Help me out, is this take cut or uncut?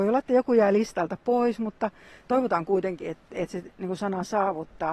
uncut